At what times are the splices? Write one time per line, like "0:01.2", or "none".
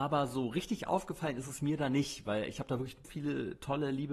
0:03.0